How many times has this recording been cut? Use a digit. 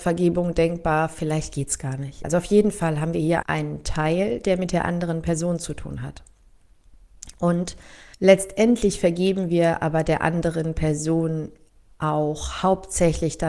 3